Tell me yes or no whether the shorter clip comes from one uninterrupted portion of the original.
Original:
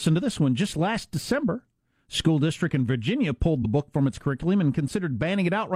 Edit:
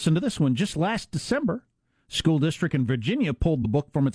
yes